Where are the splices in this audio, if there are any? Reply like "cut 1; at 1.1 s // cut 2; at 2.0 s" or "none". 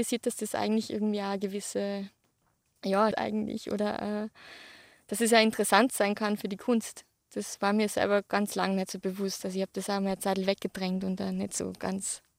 cut 1; at 3.1 s